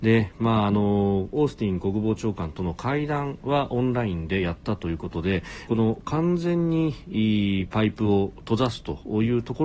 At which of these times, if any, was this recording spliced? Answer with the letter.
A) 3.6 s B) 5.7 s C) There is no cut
B